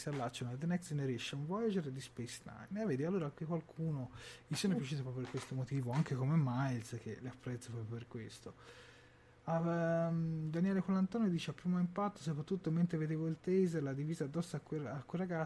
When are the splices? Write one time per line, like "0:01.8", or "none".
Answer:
none